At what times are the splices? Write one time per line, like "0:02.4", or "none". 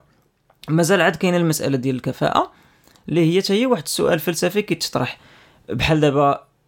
none